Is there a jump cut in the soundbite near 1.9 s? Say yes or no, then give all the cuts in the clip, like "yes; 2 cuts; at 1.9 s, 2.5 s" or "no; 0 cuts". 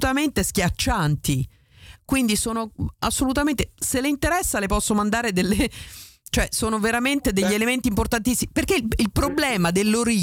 yes; 1 cut; at 1.9 s